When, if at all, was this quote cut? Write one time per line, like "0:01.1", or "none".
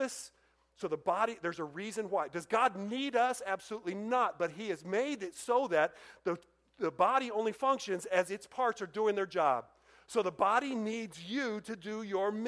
none

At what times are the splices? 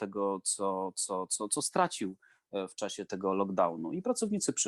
0:01.3
0:03.1

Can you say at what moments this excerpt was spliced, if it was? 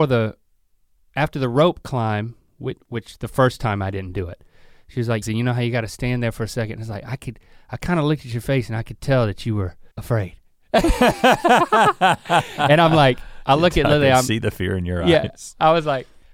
0:05.2
0:09.9

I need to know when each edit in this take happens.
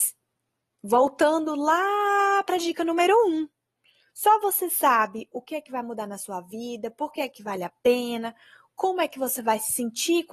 0:04.1

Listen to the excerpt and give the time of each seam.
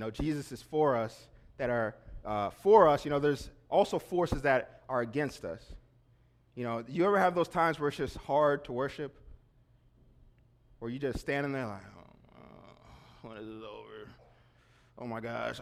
none

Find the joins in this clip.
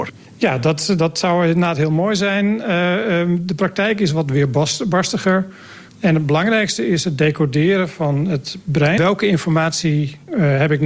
0:05.9
0:09.0

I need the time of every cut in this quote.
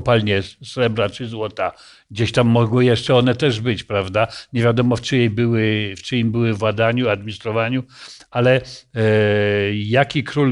none

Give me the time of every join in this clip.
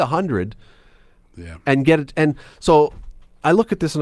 none

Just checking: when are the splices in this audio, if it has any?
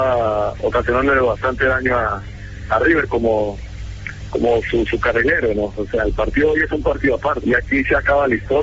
0:05.8
0:07.4

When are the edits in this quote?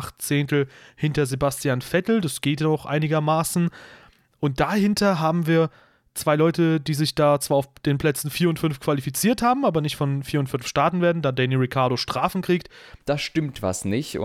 0:13.0

